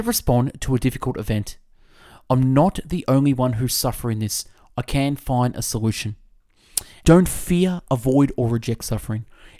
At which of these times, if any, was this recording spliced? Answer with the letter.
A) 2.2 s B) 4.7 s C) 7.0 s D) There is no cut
C